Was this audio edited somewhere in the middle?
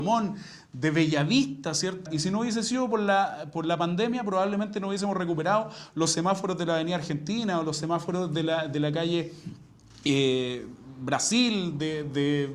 yes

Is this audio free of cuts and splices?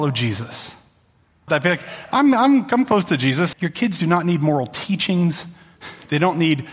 no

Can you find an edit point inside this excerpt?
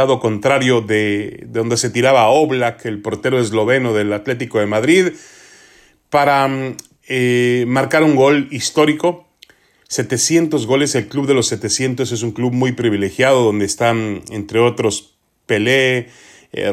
no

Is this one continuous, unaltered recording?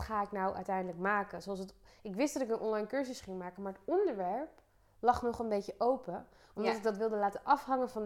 yes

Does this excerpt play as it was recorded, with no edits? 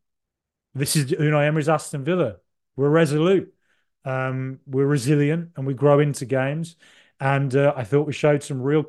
yes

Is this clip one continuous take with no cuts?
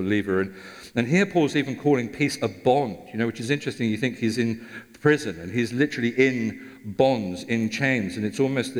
yes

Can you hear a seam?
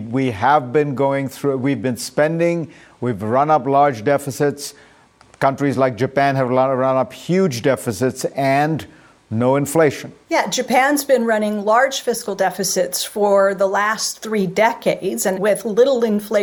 yes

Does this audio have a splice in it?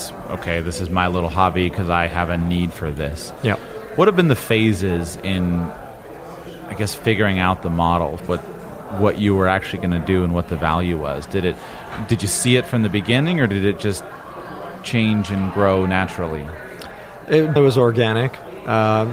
yes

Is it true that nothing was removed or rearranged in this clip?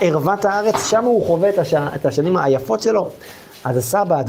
yes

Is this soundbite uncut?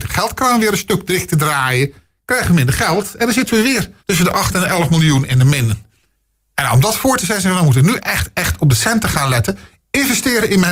no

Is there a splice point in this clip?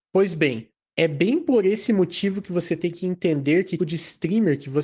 yes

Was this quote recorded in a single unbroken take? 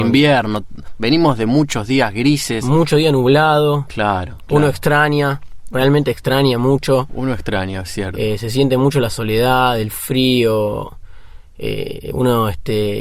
yes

